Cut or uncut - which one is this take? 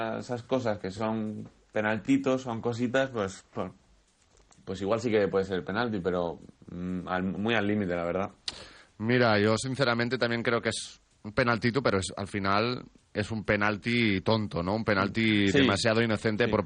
uncut